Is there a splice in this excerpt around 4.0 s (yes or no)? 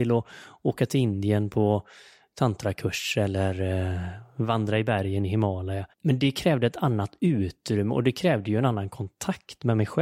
no